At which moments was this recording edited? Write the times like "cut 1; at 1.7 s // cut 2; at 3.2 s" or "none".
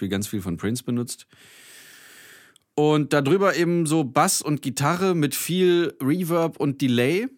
none